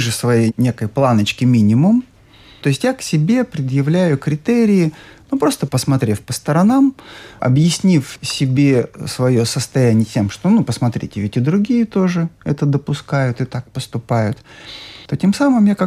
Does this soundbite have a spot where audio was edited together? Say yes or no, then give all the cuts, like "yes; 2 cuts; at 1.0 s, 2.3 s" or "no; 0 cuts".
no; 0 cuts